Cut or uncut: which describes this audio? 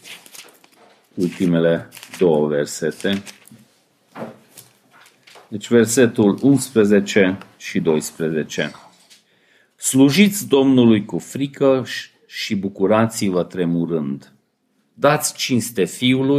uncut